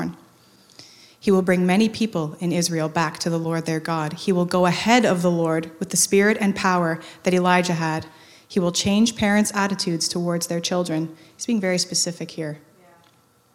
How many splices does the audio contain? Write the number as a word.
zero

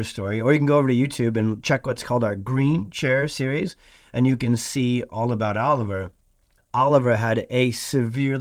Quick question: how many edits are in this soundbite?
one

